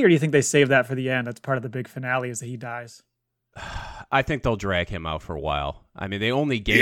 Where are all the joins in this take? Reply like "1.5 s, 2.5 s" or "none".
none